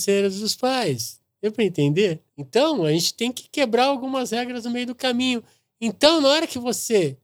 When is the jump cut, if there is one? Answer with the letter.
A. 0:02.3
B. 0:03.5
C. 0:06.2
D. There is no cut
A